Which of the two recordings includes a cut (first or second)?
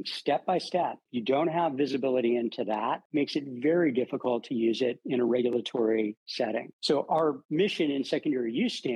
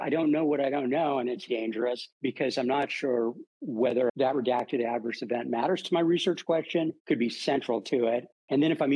second